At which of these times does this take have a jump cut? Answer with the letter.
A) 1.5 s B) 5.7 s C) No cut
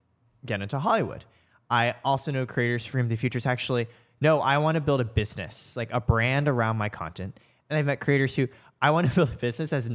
C